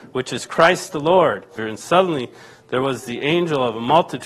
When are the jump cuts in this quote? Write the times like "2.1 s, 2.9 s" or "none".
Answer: 1.6 s